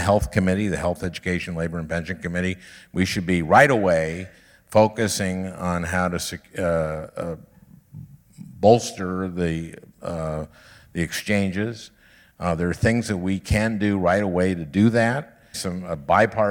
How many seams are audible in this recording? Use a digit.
1